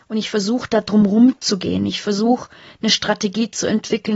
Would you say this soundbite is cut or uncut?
uncut